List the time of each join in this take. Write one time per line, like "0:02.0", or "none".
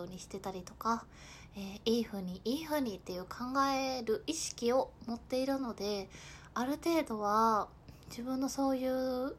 none